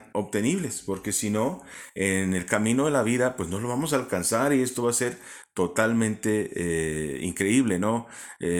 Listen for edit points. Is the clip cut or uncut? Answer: uncut